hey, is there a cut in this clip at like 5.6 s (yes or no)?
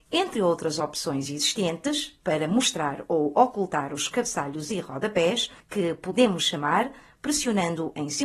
yes